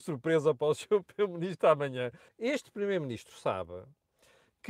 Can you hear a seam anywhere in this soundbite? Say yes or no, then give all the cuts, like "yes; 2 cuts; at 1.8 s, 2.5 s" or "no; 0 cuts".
yes; 1 cut; at 2.3 s